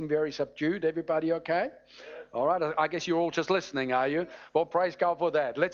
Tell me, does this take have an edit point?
no; 0 cuts

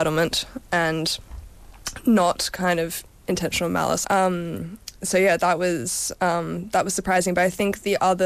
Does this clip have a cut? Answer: yes; 1 cut; at 4.0 s

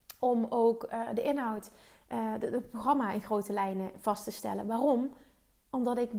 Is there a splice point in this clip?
no; 0 cuts

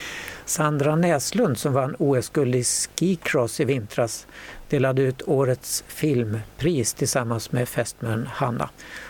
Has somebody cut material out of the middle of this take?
no; 0 cuts

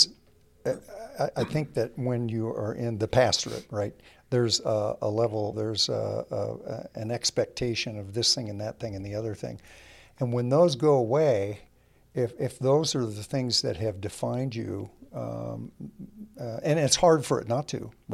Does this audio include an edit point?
yes; 2 cuts; at 5.5 s, 16.6 s

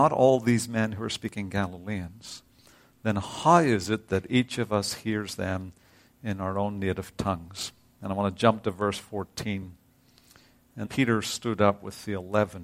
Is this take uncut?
no; 1 cut; at 10.8 s

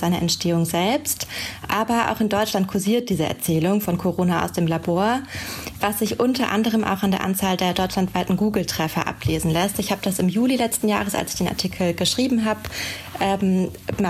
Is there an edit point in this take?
no; 0 cuts

